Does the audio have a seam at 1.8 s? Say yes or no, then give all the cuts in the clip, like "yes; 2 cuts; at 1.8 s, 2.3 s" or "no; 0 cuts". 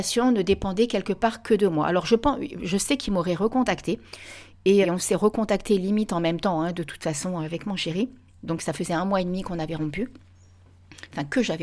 no; 1 cut; at 4.8 s